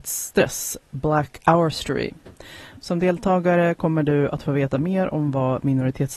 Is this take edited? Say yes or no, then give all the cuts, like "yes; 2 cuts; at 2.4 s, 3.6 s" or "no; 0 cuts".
yes; 1 cut; at 2.8 s